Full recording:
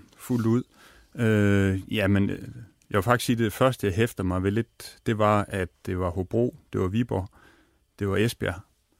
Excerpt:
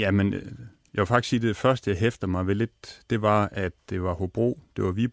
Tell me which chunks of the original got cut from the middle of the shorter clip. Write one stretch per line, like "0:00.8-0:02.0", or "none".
none